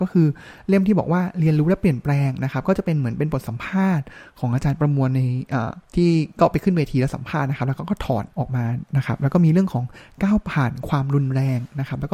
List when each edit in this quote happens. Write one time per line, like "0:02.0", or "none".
0:05.8
0:08.3